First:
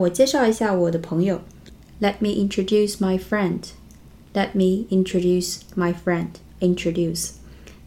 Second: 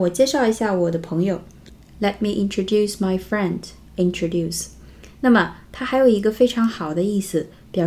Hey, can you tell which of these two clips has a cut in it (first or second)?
second